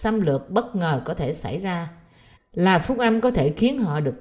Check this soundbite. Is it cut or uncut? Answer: cut